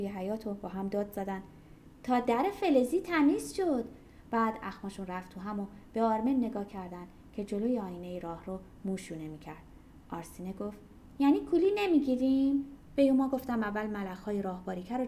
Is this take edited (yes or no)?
yes